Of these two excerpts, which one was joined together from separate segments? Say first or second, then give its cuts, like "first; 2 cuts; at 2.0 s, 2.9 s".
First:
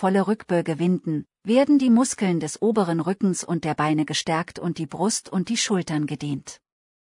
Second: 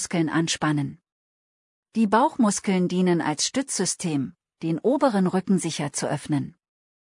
second; 1 cut; at 4.5 s